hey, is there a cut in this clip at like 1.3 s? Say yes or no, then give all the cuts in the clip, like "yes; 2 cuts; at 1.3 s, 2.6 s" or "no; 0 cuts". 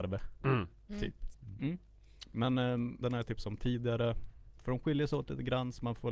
yes; 3 cuts; at 1.3 s, 3.0 s, 4.6 s